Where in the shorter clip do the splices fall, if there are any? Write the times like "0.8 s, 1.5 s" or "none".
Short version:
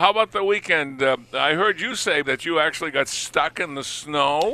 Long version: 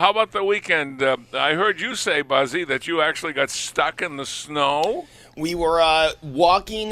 2.2 s